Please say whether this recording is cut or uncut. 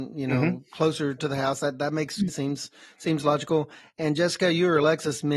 cut